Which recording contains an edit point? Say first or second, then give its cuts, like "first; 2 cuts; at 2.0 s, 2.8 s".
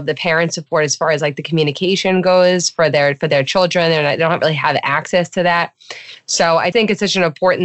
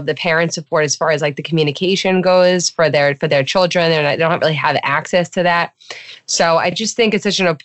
first; 1 cut; at 6.7 s